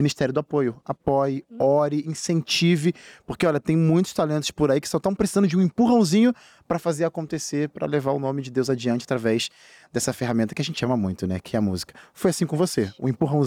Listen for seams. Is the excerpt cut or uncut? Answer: uncut